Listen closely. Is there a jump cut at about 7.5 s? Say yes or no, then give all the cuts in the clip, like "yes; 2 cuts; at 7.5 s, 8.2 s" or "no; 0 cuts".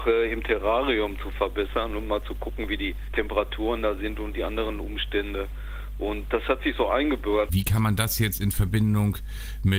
yes; 1 cut; at 7.5 s